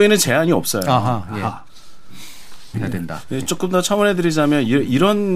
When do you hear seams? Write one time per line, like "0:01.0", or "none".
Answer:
0:02.7